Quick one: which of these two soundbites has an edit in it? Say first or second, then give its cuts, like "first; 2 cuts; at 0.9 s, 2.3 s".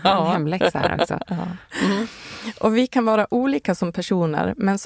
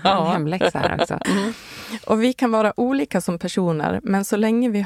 second; 1 cut; at 1.2 s